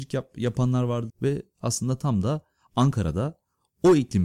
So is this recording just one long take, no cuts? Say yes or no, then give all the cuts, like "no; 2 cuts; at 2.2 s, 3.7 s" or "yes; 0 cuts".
no; 1 cut; at 1.1 s